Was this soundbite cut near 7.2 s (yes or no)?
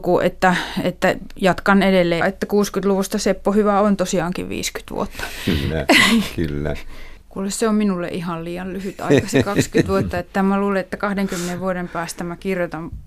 yes